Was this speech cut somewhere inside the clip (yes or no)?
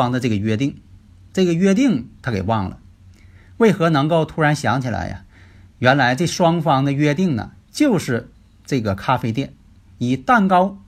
no